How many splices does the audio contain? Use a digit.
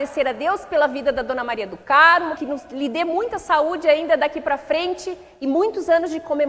1